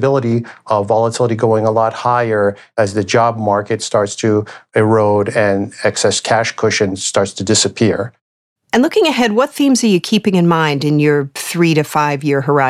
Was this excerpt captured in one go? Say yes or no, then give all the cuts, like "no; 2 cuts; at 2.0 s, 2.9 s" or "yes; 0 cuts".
yes; 0 cuts